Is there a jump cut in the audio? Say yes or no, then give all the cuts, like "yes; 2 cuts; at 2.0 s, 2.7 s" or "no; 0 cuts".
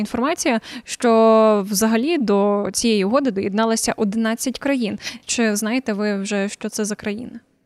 no; 0 cuts